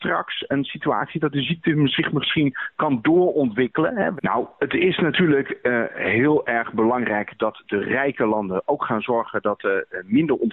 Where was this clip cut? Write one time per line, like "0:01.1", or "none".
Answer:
0:04.2